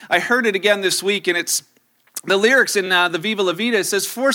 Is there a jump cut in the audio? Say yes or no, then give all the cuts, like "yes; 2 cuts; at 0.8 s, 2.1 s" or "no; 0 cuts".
no; 0 cuts